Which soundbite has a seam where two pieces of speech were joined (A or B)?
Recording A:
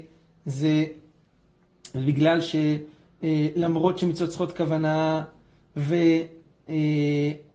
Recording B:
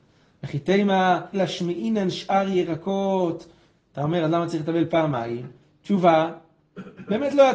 B